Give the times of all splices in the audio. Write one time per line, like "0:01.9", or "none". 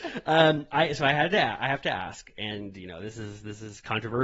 none

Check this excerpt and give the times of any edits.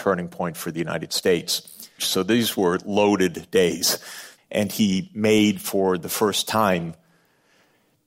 0:02.0
0:04.4

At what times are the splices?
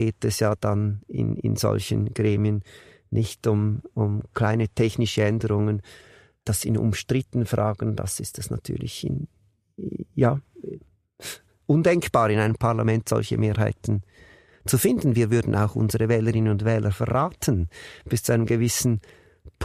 none

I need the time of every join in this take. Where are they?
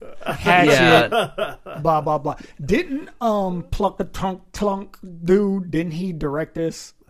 none

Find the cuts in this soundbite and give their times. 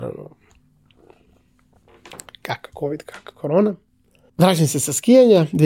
0:04.3

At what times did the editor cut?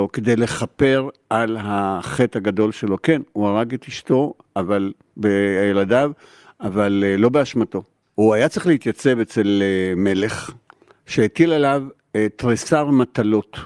0:08.0

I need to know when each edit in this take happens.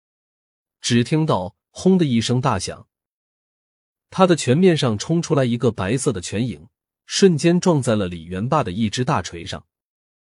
none

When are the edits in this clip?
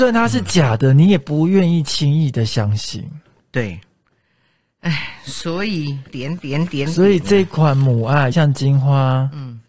0:06.1
0:08.3

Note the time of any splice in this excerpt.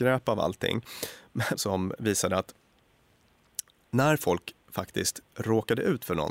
0:01.5

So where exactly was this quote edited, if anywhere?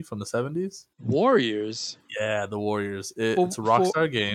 0:00.9

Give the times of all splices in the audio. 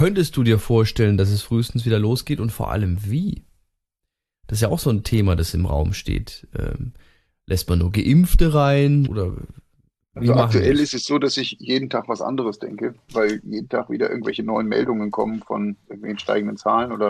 0:09.0
0:13.1

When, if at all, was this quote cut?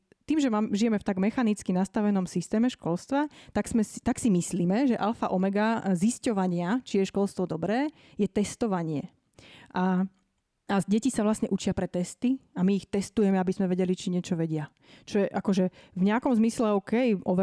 none

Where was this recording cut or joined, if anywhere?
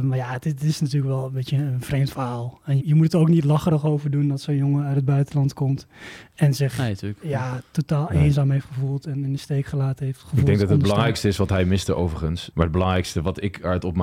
0:02.8
0:12.5

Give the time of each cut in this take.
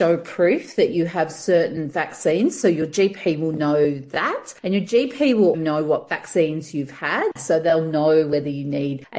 0:05.5

